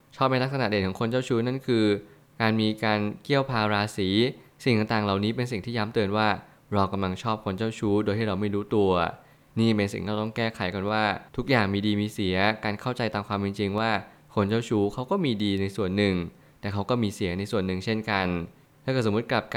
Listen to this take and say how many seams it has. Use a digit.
1